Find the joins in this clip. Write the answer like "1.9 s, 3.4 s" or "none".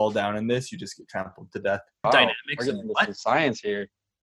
2.0 s